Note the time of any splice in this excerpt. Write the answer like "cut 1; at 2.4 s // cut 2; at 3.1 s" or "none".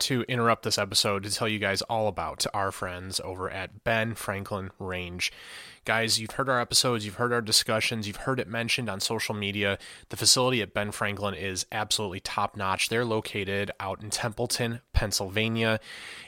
none